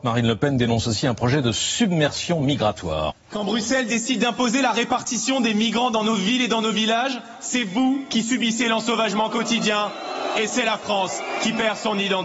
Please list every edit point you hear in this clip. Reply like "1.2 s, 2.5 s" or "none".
3.1 s